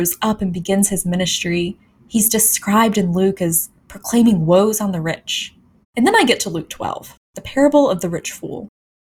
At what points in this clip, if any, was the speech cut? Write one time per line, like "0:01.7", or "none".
0:05.8
0:07.2